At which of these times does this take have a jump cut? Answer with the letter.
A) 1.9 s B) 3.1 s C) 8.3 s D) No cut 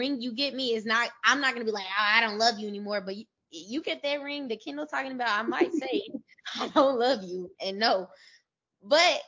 D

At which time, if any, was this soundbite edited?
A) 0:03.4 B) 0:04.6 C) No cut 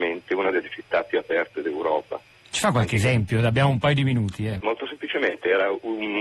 B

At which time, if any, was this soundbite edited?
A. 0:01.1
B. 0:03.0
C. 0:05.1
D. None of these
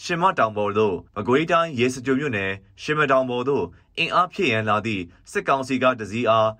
A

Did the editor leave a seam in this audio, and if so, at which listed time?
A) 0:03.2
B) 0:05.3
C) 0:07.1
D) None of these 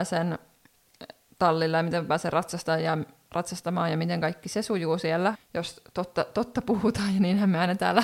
B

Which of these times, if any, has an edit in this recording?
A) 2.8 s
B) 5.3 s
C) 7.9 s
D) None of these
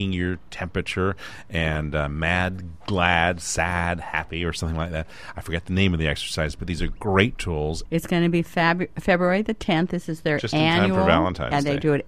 C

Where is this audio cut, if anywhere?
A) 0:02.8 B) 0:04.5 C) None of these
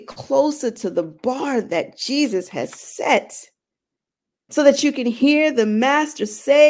B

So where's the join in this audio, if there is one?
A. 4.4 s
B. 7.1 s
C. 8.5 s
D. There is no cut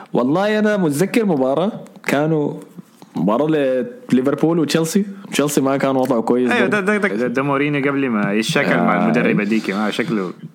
B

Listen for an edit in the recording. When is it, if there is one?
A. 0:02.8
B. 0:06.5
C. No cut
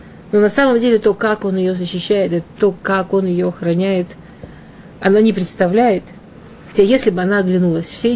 C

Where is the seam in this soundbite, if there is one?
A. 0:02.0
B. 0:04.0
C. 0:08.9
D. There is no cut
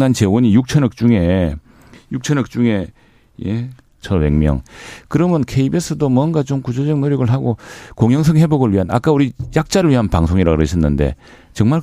B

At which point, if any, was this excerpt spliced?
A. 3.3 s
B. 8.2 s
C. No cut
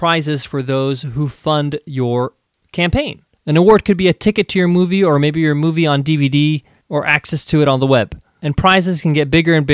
C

